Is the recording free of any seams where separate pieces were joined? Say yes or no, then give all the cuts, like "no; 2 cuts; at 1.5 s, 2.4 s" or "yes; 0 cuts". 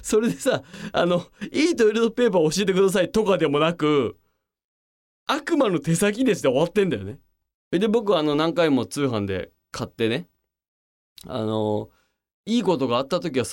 no; 1 cut; at 7.5 s